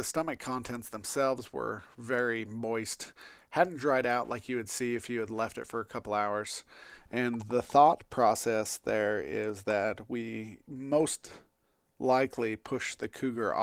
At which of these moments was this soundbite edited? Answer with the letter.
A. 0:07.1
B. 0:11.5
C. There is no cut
C